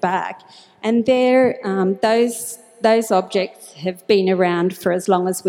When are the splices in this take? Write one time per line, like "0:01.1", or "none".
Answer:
none